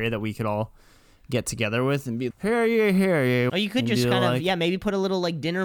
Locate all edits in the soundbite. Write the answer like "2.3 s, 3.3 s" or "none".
2.3 s, 3.5 s